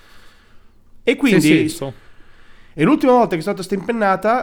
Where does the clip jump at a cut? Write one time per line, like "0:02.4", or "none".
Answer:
0:01.7